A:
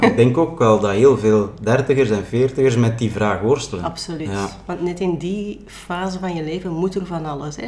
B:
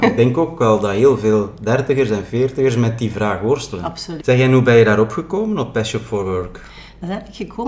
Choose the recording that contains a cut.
B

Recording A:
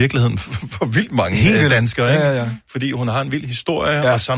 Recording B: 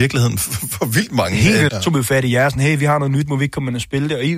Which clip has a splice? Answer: B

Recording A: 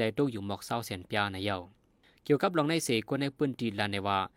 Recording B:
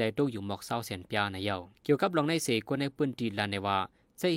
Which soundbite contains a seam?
B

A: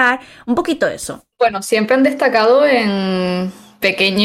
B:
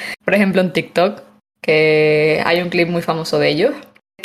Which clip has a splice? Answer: A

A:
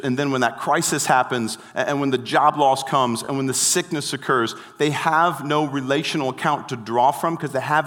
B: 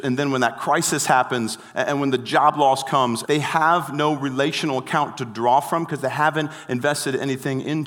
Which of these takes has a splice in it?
B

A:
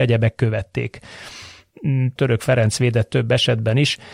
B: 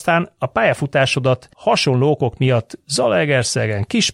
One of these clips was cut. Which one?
A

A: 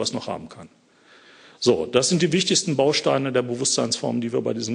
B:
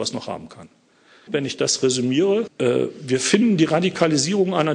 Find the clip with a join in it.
B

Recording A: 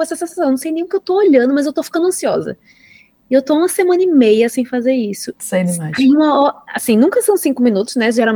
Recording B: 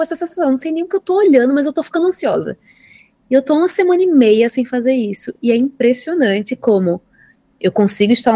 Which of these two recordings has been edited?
A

